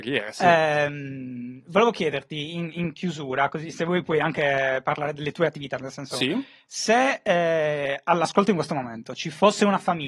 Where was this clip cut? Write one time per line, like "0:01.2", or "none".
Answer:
none